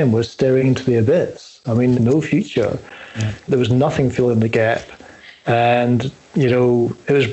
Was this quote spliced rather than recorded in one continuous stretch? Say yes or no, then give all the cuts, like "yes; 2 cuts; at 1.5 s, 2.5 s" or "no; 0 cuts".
yes; 2 cuts; at 1.9 s, 3.5 s